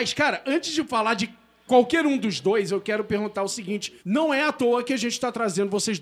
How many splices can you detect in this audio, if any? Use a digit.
1